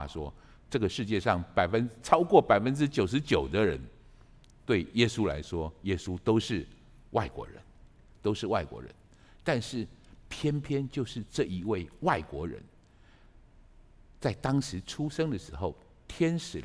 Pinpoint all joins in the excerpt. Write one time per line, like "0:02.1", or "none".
none